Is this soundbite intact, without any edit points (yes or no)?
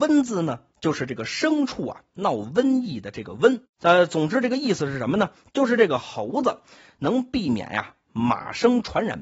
no